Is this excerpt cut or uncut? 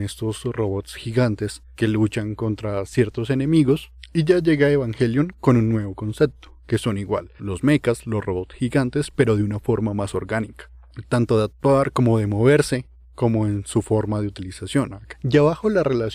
uncut